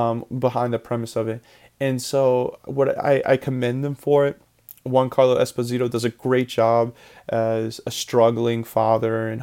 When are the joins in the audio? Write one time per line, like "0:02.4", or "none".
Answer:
none